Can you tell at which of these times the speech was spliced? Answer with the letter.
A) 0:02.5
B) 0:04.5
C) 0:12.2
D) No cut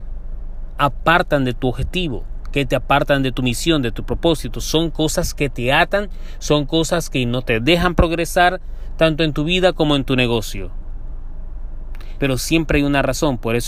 C